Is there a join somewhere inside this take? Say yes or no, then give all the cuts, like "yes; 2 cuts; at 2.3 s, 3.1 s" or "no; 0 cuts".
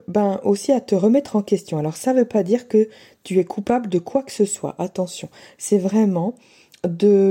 no; 0 cuts